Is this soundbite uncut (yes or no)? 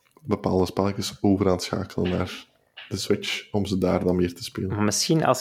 yes